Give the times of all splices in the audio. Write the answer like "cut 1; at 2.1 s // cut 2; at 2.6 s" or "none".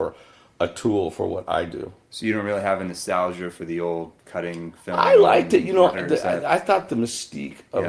cut 1; at 4.2 s // cut 2; at 5.9 s